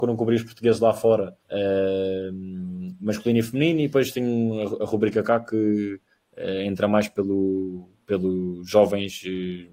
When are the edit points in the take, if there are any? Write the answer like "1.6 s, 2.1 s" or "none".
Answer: 1.4 s